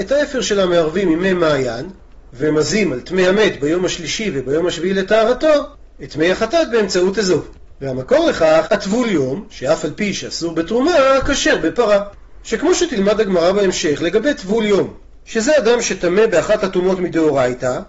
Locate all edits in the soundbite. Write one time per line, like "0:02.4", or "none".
0:08.7